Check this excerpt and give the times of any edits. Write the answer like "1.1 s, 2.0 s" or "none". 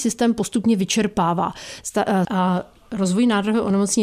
2.2 s